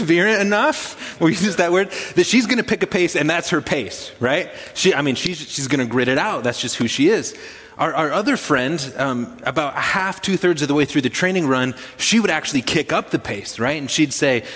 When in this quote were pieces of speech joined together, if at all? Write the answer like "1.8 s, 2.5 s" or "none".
none